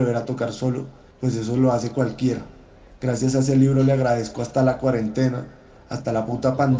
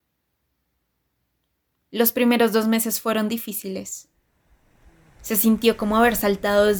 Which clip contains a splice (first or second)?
first